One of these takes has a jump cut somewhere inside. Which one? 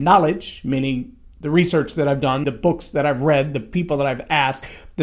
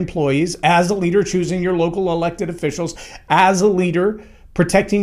first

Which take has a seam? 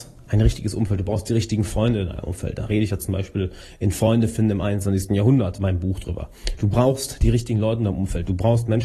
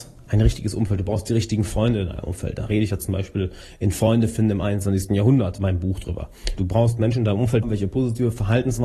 second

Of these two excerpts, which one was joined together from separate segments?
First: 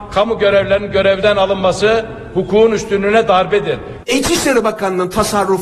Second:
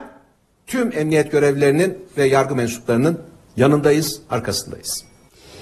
first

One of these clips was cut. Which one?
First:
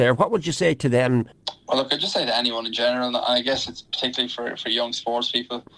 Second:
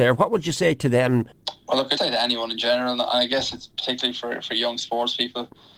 second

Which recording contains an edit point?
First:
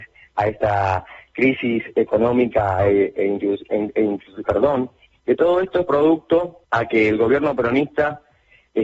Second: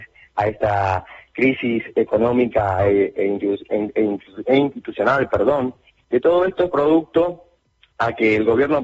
first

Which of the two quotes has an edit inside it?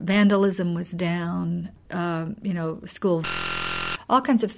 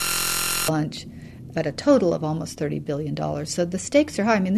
first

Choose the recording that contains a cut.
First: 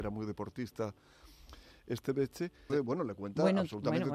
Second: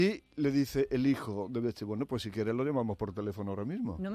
first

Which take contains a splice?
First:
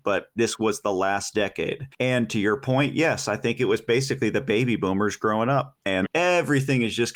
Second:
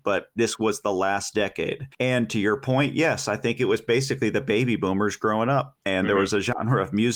first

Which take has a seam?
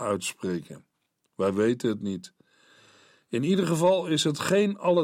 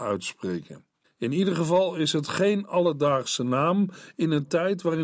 second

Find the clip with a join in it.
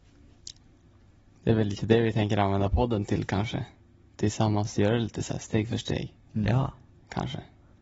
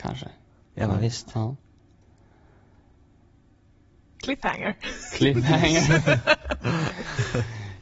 second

